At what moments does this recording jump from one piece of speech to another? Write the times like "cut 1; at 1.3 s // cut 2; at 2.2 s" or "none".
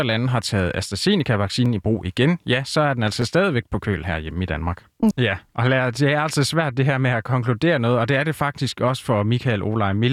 cut 1; at 5.1 s